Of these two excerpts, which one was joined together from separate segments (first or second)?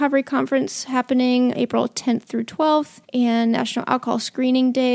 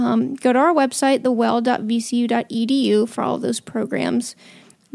first